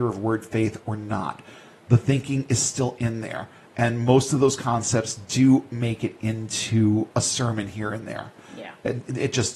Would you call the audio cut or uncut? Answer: uncut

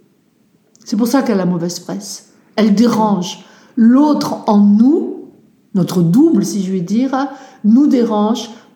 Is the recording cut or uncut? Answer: uncut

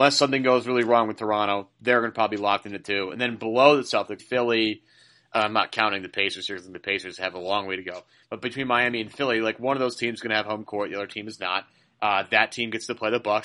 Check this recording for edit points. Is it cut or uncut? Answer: cut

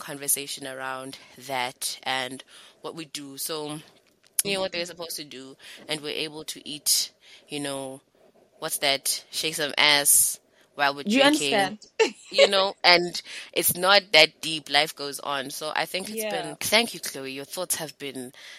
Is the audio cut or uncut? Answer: cut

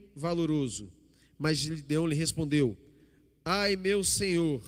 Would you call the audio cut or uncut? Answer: uncut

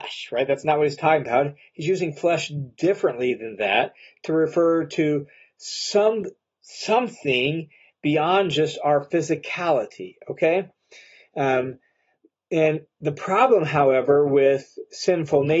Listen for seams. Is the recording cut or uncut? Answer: uncut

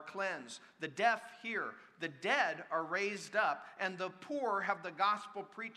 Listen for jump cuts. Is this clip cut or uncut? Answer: uncut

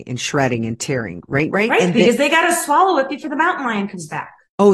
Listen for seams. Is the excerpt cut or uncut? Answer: cut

